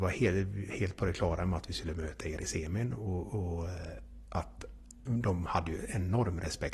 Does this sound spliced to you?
no; 0 cuts

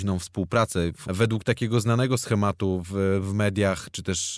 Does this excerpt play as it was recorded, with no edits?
no; 1 cut; at 1.0 s

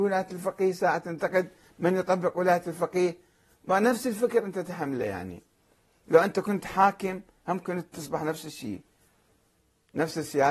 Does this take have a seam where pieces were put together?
no; 0 cuts

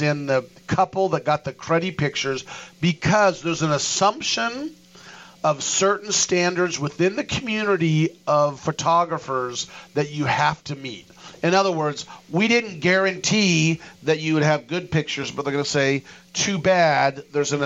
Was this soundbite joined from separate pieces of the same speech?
no; 0 cuts

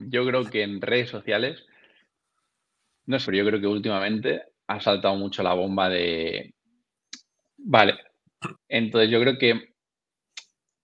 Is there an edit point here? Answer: yes; 3 cuts; at 3.3 s, 7.5 s, 8.5 s

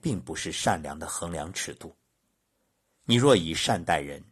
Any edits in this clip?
yes; 1 cut; at 2.9 s

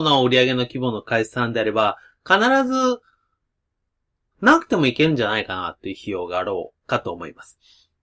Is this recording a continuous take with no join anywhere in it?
no; 1 cut; at 4.3 s

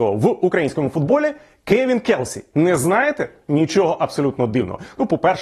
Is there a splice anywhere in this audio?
no; 0 cuts

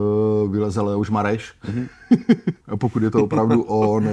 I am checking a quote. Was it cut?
yes; 1 cut; at 2.6 s

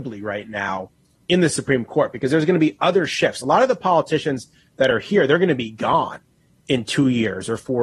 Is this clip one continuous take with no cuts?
yes; 0 cuts

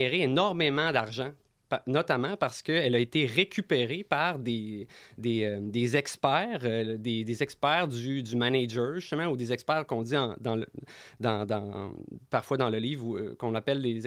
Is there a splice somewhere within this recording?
no; 0 cuts

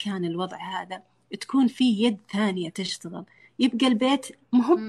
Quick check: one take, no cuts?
yes; 0 cuts

